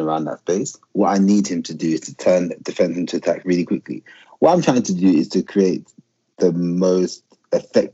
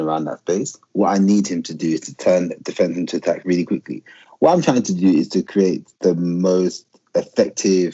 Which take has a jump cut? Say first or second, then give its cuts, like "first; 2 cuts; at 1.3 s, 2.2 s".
second; 1 cut; at 5.9 s